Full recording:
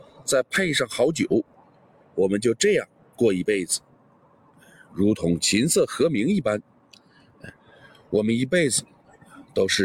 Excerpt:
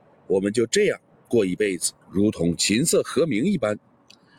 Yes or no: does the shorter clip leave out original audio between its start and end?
yes